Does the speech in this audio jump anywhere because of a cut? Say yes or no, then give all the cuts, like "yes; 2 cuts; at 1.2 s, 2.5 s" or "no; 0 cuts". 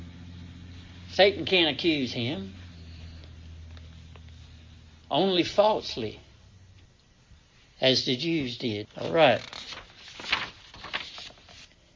yes; 1 cut; at 8.8 s